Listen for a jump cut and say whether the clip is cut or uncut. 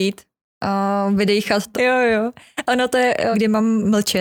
cut